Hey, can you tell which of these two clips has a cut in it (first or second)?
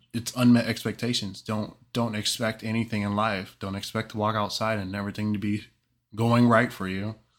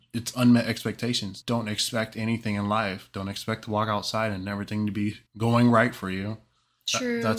second